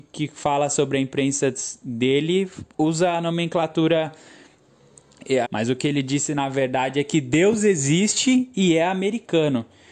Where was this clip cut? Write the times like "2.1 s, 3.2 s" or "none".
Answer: 5.4 s

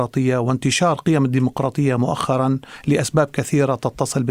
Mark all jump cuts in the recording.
none

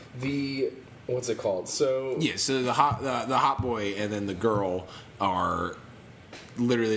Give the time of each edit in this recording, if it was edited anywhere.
none

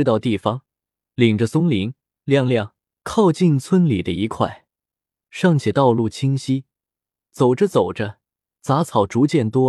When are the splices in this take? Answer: 3.0 s

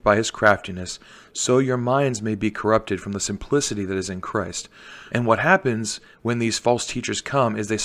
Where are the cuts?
5.1 s

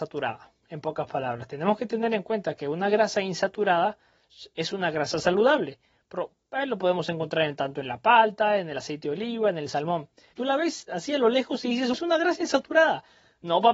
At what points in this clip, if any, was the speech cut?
10.3 s, 11.9 s

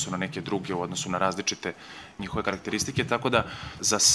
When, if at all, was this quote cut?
none

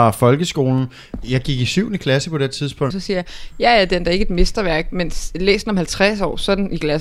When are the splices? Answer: 2.9 s

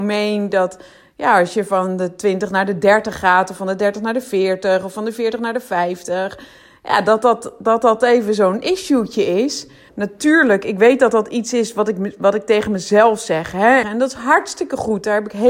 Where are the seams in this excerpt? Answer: 9.9 s, 13.8 s

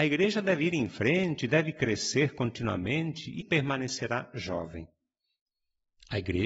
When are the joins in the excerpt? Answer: 3.4 s

